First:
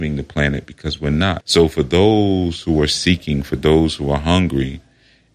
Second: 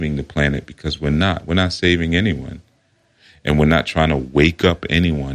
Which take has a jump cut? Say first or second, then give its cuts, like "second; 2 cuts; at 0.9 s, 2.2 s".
first; 1 cut; at 1.4 s